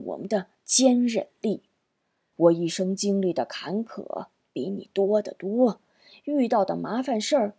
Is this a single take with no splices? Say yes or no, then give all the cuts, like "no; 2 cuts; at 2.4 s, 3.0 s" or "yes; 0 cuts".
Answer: no; 1 cut; at 2.3 s